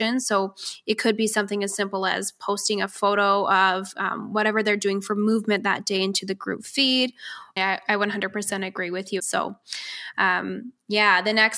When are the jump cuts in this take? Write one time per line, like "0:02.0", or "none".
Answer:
0:07.6
0:09.2